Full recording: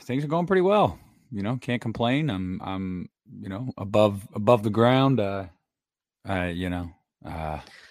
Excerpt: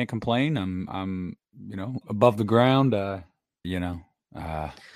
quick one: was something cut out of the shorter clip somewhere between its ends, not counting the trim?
yes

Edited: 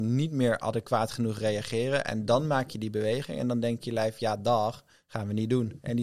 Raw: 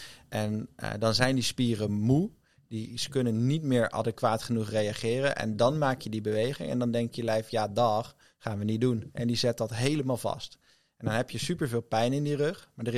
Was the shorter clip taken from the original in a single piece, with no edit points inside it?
yes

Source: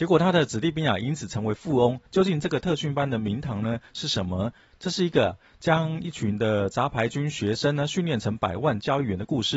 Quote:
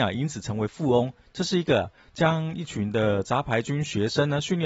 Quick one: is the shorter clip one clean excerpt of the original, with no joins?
no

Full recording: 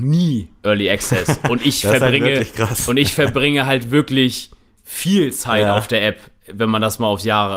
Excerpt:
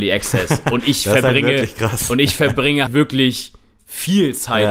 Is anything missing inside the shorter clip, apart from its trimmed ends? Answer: yes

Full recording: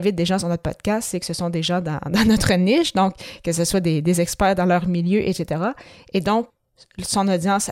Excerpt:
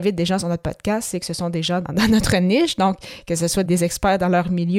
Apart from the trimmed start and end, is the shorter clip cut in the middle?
yes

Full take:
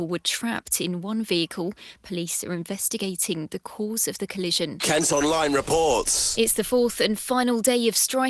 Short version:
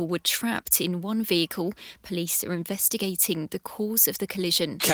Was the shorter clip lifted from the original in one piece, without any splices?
yes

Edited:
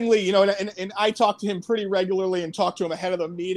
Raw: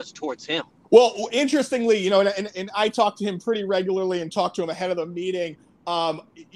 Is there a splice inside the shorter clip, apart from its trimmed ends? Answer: no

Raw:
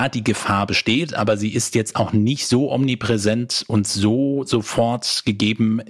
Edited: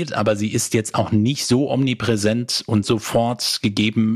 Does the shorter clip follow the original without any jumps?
no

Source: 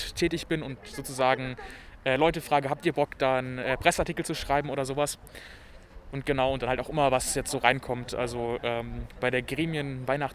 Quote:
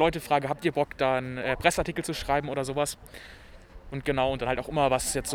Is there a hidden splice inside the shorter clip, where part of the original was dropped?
no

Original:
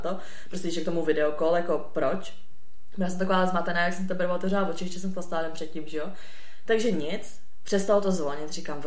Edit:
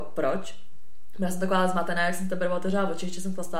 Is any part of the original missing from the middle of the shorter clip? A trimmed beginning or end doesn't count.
no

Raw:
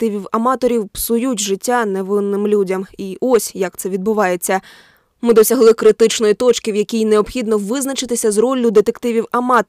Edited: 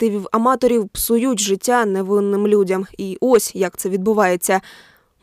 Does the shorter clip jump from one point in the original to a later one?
no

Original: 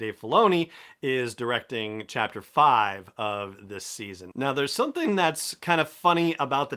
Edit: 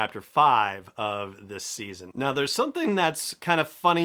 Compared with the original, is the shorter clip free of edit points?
yes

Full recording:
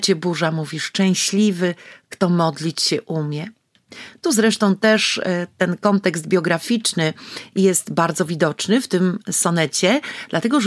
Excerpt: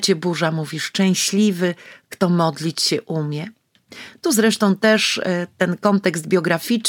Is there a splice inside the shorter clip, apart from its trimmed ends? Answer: no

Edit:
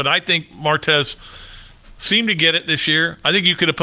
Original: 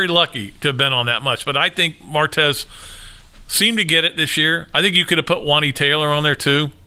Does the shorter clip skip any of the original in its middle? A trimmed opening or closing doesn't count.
no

